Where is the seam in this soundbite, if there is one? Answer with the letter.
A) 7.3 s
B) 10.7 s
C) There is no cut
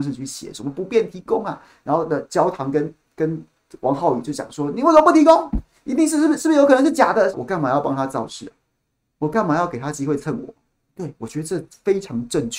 A